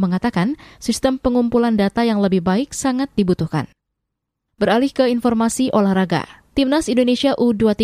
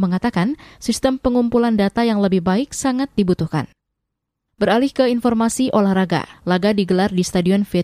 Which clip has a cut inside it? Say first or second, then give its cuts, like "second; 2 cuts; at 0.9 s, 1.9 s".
second; 1 cut; at 6.3 s